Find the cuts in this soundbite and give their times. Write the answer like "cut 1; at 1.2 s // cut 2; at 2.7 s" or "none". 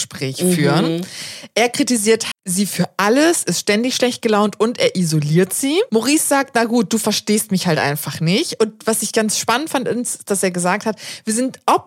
cut 1; at 2.3 s